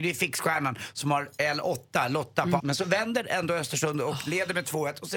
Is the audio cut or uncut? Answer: cut